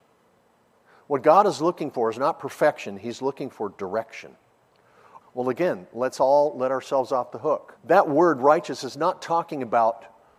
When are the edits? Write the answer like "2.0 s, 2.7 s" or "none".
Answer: 5.2 s, 7.8 s